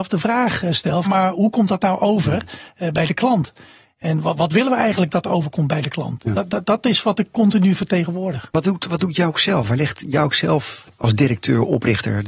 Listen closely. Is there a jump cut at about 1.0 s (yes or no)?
yes